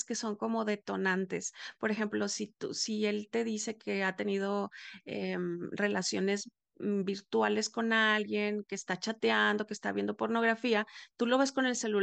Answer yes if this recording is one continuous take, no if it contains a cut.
yes